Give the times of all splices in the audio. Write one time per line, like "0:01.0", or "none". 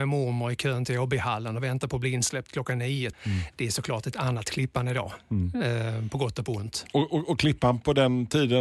0:03.1